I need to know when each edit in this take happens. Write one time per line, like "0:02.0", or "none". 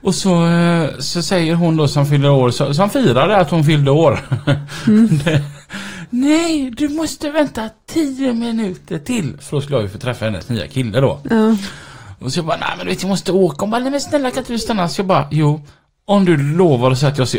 0:01.9